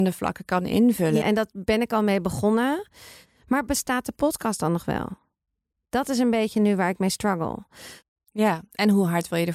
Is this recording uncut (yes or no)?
no